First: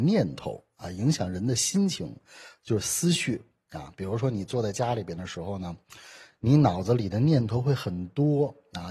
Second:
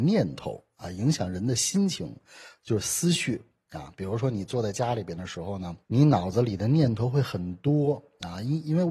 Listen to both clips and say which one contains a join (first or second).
second